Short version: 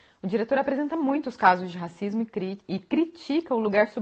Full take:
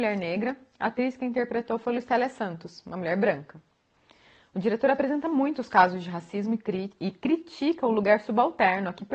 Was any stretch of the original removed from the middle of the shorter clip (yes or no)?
no